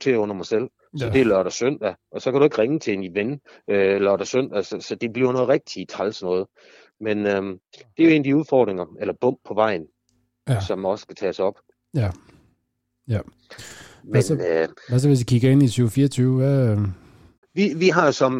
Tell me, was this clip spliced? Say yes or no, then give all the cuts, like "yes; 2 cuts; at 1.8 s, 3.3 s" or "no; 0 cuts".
no; 0 cuts